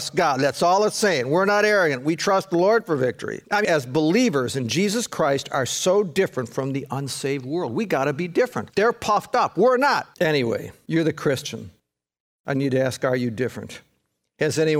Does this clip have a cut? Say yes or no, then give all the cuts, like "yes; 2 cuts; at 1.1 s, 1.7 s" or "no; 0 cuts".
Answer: yes; 1 cut; at 3.6 s